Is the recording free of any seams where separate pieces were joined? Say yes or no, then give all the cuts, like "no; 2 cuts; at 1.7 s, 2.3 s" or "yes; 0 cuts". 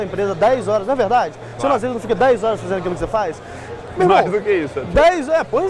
yes; 0 cuts